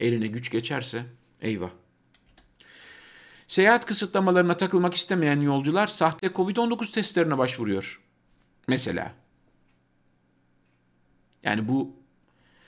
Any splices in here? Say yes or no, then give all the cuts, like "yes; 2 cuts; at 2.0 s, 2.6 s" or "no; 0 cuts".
no; 0 cuts